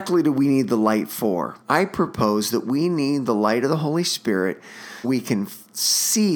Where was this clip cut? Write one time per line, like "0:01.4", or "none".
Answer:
0:01.6
0:05.0